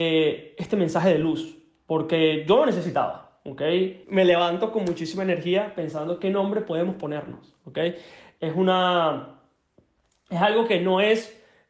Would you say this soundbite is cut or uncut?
cut